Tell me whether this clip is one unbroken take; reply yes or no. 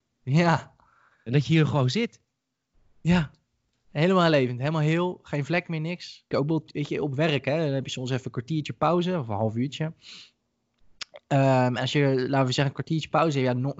no